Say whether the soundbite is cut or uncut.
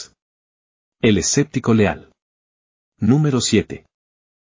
uncut